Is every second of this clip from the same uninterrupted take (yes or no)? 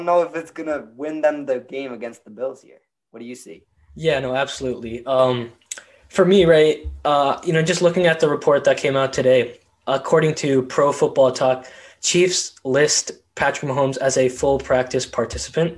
yes